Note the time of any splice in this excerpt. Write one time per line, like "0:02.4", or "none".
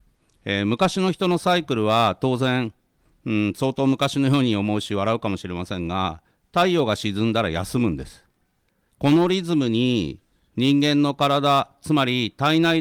0:08.9